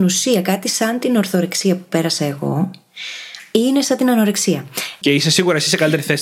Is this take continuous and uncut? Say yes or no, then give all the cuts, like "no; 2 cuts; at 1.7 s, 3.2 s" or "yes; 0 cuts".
no; 1 cut; at 5.0 s